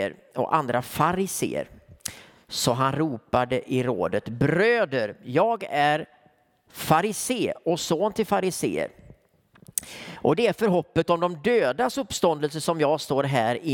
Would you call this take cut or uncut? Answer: uncut